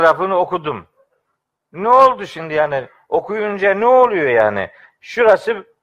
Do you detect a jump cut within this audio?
no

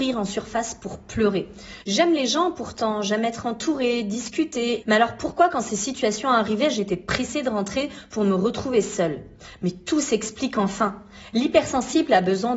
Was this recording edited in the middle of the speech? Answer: yes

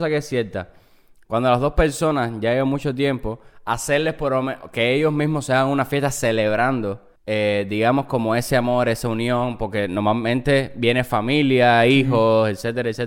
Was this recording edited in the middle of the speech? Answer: yes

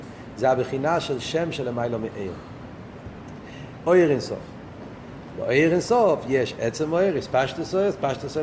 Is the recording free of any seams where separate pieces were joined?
no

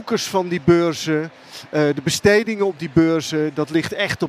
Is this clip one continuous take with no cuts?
yes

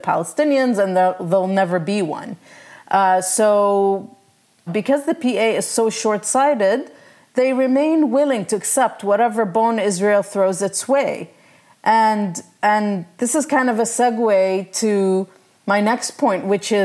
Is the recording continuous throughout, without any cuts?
no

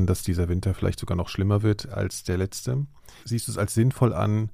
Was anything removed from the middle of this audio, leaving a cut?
no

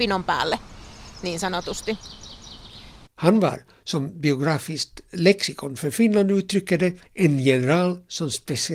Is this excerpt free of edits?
no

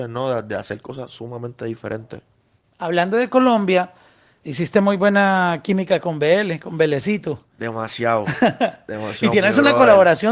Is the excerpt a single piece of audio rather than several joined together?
yes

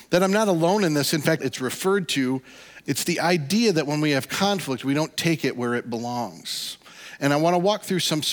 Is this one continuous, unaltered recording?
no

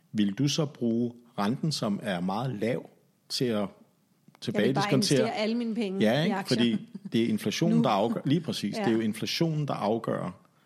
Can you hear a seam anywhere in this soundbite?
no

